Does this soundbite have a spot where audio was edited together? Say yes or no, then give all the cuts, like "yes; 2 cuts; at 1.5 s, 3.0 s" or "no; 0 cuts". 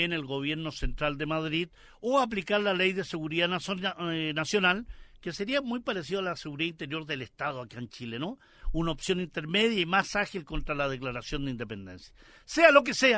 no; 0 cuts